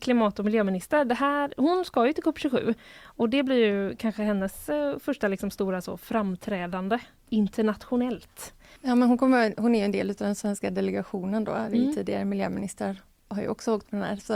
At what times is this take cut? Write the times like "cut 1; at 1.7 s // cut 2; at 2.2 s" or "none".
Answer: cut 1; at 8.8 s